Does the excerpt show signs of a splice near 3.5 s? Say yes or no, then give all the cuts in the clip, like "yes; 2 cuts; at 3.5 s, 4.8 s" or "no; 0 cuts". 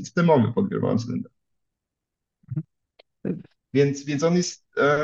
yes; 1 cut; at 3.5 s